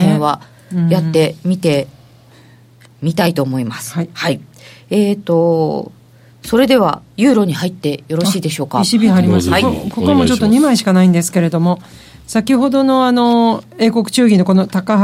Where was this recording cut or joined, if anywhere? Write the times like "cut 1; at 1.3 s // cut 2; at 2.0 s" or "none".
none